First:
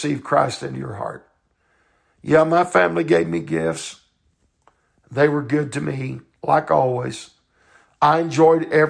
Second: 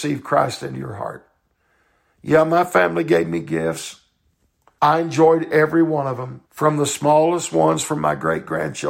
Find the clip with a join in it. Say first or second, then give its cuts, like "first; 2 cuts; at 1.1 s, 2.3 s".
second; 2 cuts; at 4.8 s, 6.5 s